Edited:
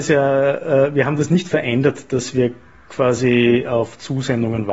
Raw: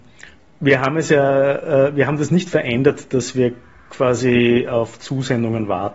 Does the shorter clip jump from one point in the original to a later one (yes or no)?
no